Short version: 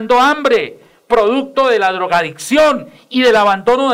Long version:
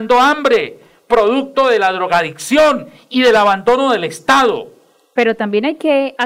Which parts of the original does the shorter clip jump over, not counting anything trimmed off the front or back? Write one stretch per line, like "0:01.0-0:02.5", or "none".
none